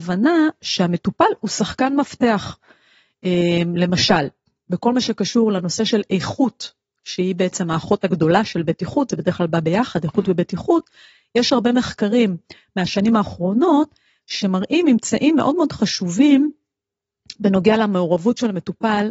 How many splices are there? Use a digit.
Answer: 0